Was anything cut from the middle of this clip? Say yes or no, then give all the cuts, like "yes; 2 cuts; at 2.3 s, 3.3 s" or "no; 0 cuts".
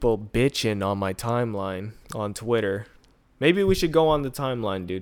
yes; 1 cut; at 2.0 s